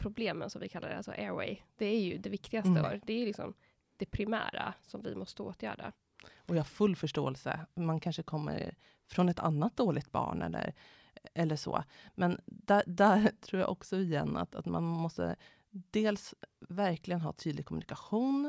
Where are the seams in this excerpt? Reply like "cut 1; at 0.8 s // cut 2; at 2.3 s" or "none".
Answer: cut 1; at 2.8 s